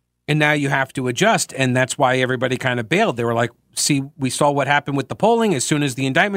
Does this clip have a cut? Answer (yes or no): no